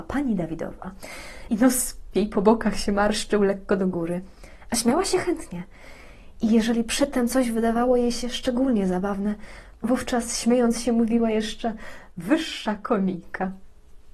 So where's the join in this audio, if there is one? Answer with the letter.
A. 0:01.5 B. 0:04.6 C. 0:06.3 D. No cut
A